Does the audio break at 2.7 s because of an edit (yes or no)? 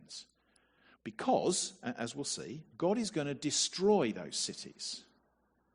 yes